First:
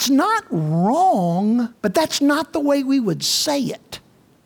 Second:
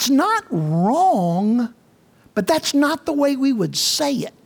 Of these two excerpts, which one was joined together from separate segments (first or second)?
first